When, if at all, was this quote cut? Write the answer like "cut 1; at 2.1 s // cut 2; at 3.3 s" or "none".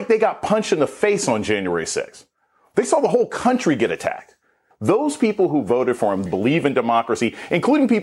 cut 1; at 4.7 s // cut 2; at 6.3 s